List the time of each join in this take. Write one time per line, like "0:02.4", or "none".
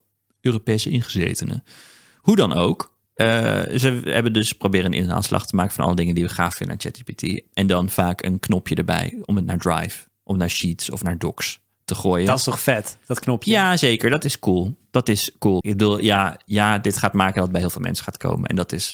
0:15.6